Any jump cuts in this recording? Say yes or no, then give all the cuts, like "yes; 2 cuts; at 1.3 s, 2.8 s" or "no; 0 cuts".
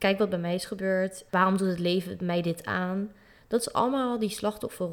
yes; 1 cut; at 1.3 s